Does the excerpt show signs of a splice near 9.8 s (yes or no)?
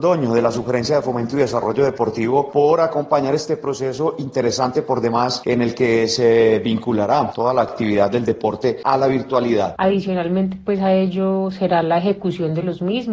yes